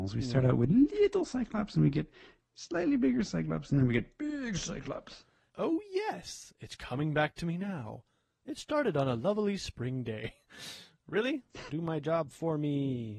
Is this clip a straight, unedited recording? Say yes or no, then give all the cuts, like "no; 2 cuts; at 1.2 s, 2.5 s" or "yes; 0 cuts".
no; 2 cuts; at 5.5 s, 11.7 s